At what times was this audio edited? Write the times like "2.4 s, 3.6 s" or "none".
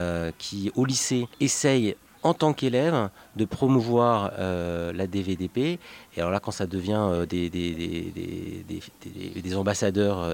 1.3 s